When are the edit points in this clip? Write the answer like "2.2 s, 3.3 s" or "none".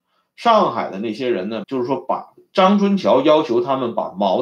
1.6 s